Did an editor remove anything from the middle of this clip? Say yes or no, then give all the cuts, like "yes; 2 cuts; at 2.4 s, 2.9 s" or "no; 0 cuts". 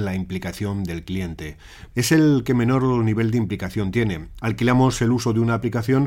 yes; 2 cuts; at 1.9 s, 4.4 s